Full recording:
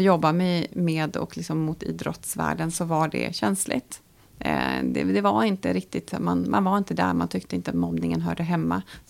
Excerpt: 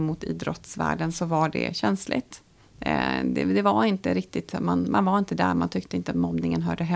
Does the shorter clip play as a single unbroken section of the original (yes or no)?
yes